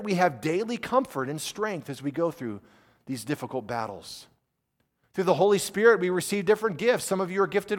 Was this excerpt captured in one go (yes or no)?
yes